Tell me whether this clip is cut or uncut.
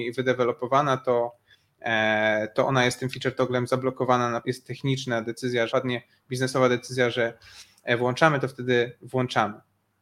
cut